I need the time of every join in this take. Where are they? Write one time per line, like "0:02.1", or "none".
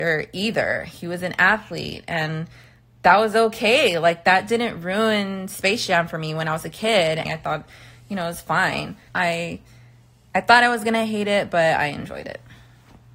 0:07.2
0:09.1